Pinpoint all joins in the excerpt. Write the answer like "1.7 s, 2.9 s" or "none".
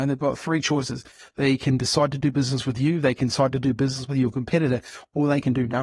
none